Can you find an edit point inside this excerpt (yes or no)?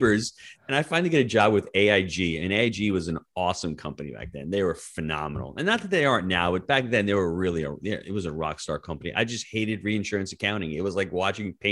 no